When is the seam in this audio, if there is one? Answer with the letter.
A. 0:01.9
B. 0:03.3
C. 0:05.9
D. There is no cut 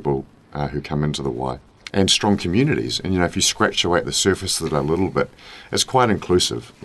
A